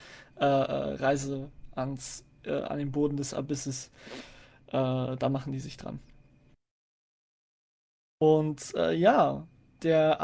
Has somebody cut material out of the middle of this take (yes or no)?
no